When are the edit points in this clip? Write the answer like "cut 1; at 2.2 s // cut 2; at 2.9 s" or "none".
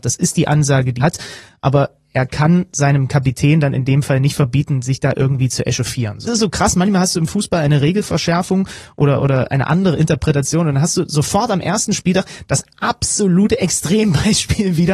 cut 1; at 1.0 s // cut 2; at 6.3 s